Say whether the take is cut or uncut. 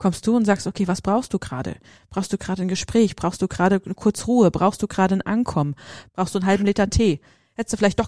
cut